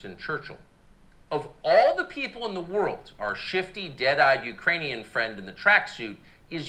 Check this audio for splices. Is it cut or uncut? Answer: uncut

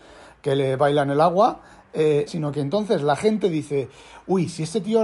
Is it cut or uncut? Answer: cut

